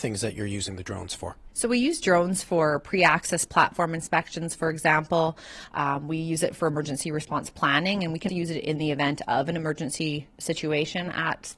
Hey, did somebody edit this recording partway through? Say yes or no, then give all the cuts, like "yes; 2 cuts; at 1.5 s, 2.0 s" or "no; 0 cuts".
yes; 2 cuts; at 5.7 s, 8.3 s